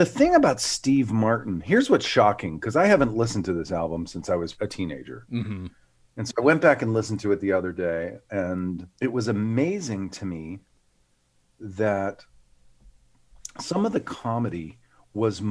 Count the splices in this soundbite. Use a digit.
2